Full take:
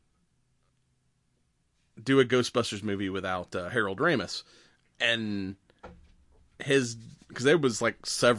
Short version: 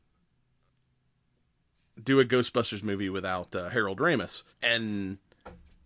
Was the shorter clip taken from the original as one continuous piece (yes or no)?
no